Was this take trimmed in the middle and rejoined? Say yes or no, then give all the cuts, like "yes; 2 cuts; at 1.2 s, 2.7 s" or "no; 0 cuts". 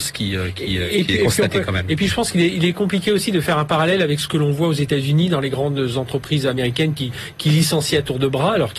no; 0 cuts